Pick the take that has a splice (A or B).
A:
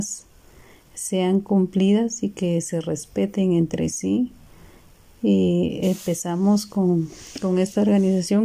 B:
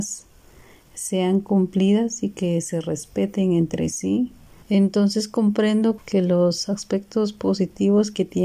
B